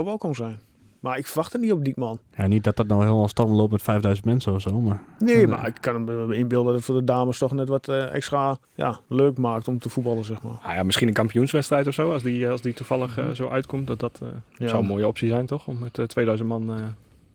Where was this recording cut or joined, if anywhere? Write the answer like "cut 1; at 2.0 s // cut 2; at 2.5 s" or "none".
cut 1; at 8.6 s

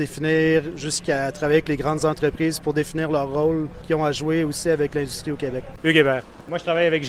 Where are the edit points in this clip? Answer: cut 1; at 5.8 s

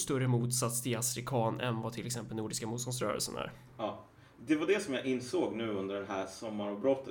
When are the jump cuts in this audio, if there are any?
none

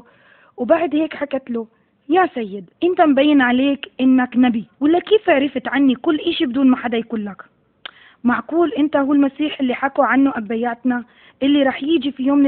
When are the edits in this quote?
cut 1; at 2.8 s // cut 2; at 4.7 s

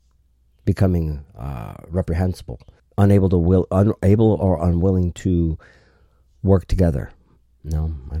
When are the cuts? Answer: cut 1; at 2.8 s

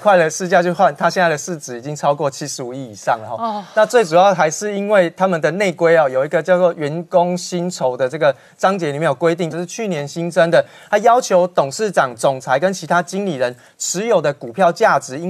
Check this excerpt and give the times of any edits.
cut 1; at 9.5 s

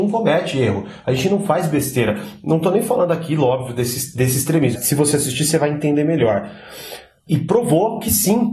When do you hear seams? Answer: cut 1; at 4.7 s // cut 2; at 7.3 s

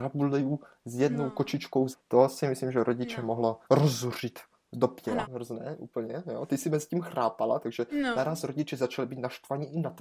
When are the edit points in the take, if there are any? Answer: cut 1; at 1.9 s // cut 2; at 3.6 s // cut 3; at 5.2 s

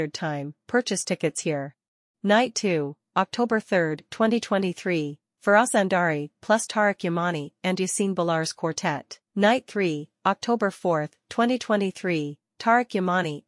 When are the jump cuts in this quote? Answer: cut 1; at 2.1 s // cut 2; at 9.3 s

